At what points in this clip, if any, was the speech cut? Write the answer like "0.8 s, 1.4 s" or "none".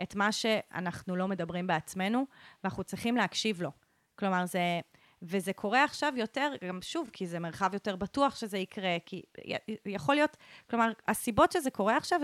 none

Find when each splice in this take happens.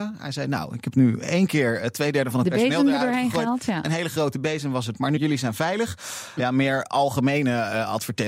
5.2 s, 6.4 s

